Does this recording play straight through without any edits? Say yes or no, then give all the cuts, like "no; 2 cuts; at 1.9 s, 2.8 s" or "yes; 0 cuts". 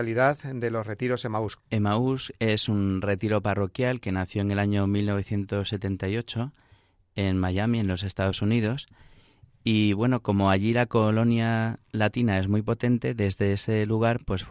no; 1 cut; at 1.6 s